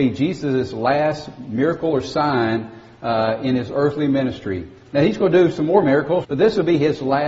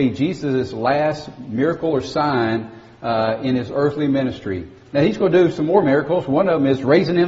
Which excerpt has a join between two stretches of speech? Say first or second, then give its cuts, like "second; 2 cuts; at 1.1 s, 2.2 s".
first; 1 cut; at 6.2 s